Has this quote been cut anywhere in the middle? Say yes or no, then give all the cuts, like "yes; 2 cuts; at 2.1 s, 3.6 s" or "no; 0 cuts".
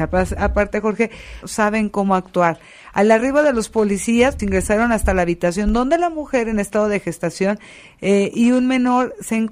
yes; 2 cuts; at 1.4 s, 4.4 s